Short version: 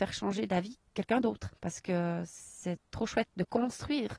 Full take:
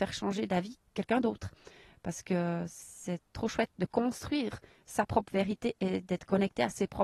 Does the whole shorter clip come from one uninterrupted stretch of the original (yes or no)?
no